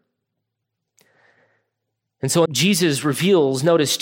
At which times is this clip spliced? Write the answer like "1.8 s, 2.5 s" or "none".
2.5 s